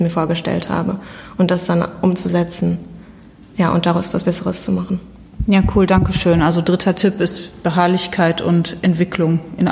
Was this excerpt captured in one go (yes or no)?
yes